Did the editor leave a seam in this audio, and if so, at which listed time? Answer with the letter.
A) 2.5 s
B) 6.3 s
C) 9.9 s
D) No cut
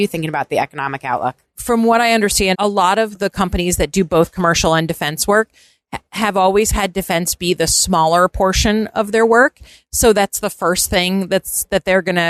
A